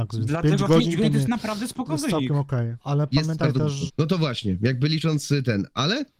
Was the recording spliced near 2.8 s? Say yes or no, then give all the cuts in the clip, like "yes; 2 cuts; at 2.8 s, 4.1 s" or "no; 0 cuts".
yes; 2 cuts; at 2.8 s, 3.9 s